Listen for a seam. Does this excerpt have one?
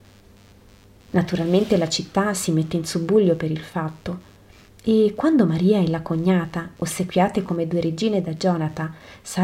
no; 0 cuts

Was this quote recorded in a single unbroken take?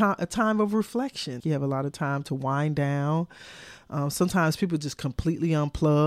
no; 1 cut; at 1.4 s

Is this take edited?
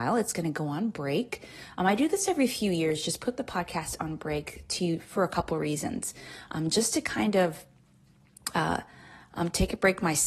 no; 0 cuts

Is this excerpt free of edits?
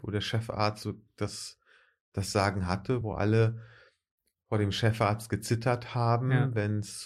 yes; 0 cuts

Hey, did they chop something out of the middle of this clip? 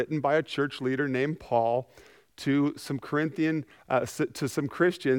no; 0 cuts

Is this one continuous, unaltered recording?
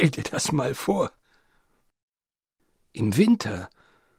yes; 0 cuts

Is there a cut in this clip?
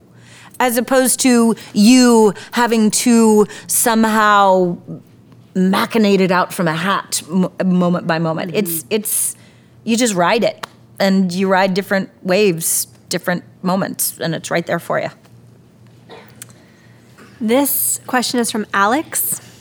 no; 0 cuts

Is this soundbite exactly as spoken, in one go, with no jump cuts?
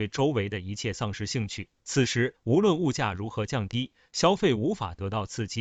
no; 1 cut; at 1.8 s

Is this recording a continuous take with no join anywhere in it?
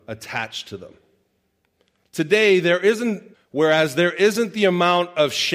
no; 2 cuts; at 2.0 s, 3.3 s

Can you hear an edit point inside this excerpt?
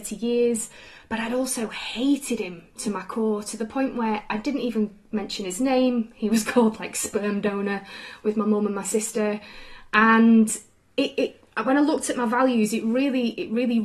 no; 0 cuts

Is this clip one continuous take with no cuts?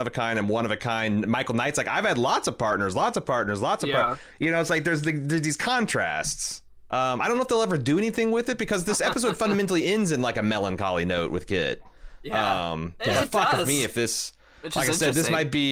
yes; 0 cuts

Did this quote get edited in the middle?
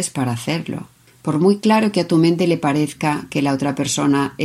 no; 0 cuts

